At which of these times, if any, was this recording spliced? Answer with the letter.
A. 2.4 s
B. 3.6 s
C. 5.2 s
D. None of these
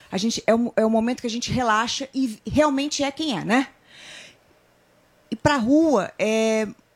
A